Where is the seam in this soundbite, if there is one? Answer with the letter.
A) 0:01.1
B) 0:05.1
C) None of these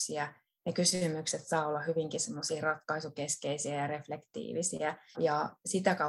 B